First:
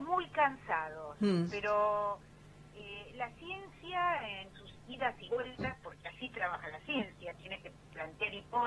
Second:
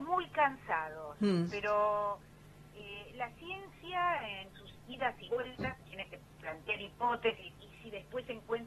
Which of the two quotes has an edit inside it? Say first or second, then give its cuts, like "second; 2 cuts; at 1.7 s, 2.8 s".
second; 2 cuts; at 5.8 s, 7.5 s